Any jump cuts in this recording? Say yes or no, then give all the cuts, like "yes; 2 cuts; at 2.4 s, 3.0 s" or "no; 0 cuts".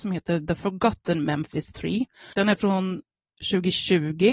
yes; 1 cut; at 2.3 s